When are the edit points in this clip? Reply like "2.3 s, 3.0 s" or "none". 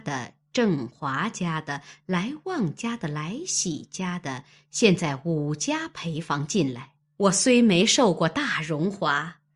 7.1 s

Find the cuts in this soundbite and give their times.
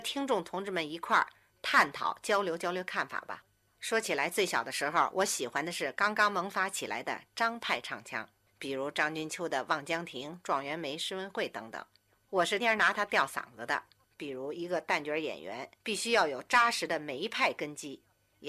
12.6 s, 14.1 s, 15.8 s

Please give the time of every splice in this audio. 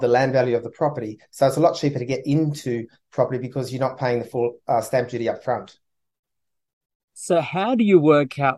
none

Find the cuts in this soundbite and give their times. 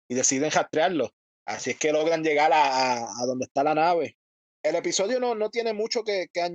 none

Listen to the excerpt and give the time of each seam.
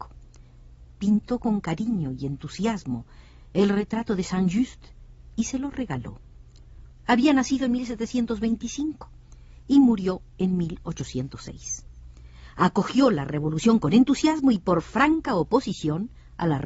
6.9 s

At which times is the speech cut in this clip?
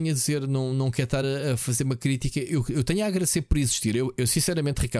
none

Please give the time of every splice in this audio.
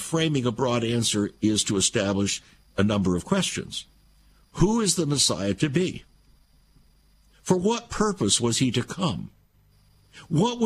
none

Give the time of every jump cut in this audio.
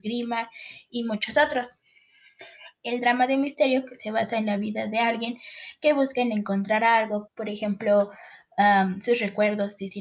7.3 s

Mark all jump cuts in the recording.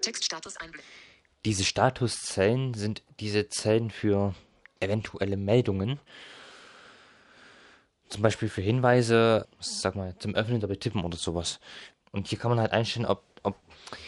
9.4 s, 11.9 s

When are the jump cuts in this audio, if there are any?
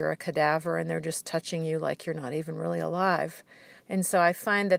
3.8 s

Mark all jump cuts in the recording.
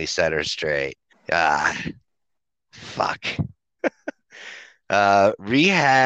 1.1 s, 3.8 s

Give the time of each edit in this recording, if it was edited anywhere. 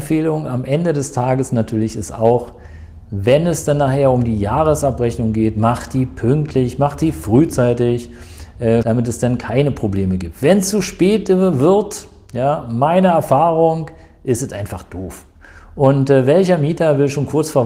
8.8 s

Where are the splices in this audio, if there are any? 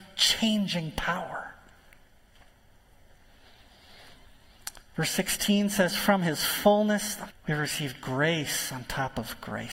7.3 s

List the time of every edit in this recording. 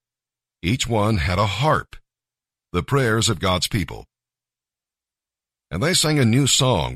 2.6 s

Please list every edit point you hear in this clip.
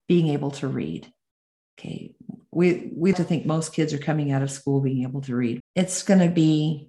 3.1 s, 5.6 s

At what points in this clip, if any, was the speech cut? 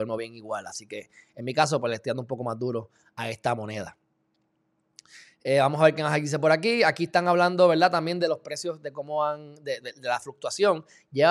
none

